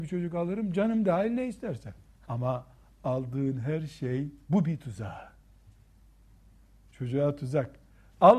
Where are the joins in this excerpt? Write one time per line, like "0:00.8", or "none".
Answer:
0:02.2
0:04.4